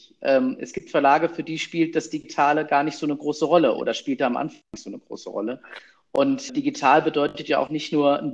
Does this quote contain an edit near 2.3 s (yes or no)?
no